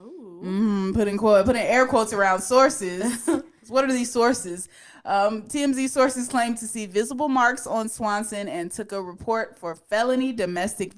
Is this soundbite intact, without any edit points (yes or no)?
yes